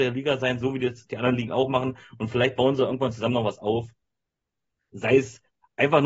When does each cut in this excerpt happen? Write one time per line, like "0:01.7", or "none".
none